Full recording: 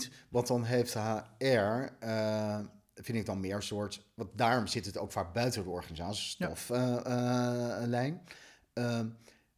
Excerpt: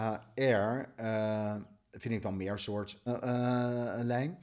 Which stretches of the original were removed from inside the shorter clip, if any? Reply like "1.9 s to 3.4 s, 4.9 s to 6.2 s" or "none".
4.1 s to 6.9 s